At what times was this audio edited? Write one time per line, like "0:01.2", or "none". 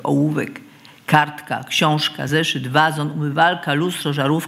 none